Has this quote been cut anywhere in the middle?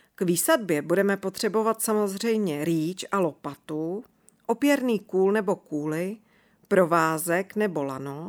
no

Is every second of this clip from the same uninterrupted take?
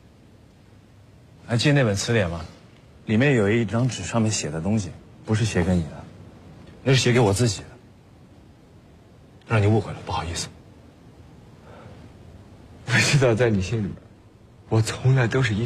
yes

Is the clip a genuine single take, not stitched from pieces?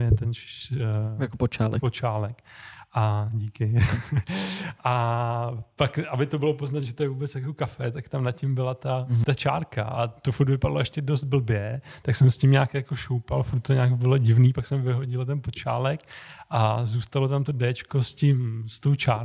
yes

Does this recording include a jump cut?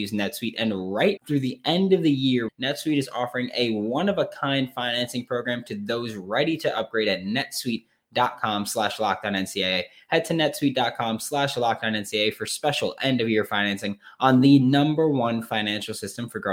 yes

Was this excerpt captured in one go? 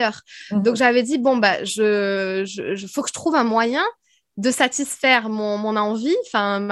yes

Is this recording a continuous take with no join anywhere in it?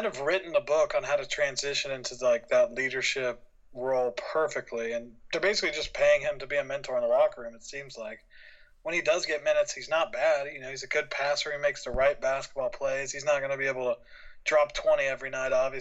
yes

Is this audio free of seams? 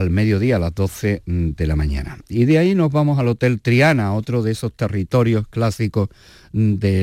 yes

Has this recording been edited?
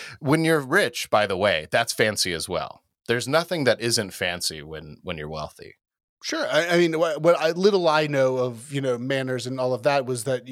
no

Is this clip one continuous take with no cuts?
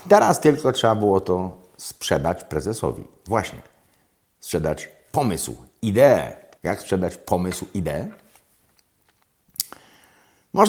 no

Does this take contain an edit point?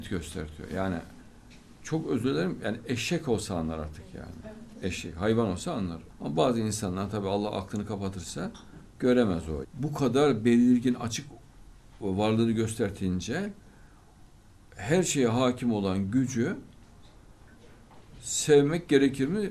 yes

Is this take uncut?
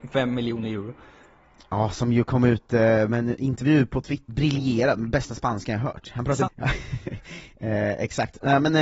no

